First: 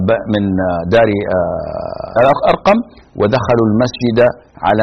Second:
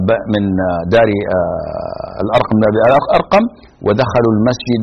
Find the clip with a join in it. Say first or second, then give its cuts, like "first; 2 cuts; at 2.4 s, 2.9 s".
first; 1 cut; at 2.2 s